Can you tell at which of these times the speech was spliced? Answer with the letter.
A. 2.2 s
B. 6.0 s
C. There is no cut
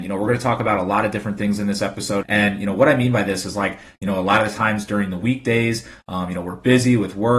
A